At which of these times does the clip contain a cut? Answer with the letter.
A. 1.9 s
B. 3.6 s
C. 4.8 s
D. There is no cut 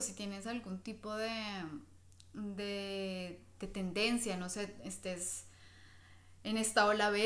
D